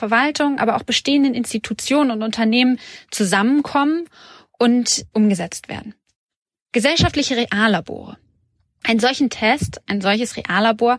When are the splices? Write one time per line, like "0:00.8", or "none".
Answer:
none